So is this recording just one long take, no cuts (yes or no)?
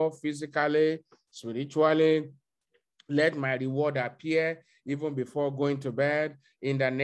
yes